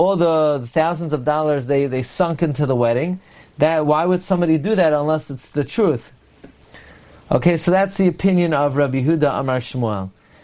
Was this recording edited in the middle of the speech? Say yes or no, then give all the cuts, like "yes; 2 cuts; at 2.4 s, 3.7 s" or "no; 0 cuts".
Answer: no; 0 cuts